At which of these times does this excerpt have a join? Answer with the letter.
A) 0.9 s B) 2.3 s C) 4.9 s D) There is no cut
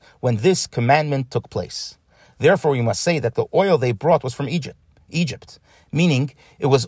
B